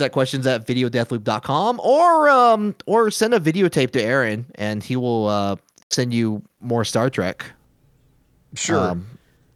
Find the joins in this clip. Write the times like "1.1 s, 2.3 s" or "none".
none